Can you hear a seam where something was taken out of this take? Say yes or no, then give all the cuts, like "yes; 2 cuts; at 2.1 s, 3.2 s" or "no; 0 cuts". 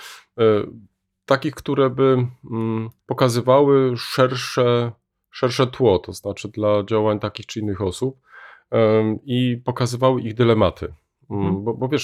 yes; 1 cut; at 3.0 s